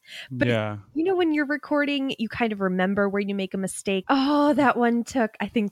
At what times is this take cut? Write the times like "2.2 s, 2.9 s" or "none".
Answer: 4.0 s